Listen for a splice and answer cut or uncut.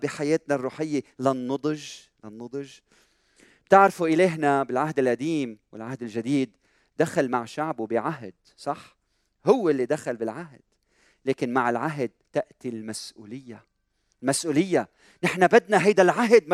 uncut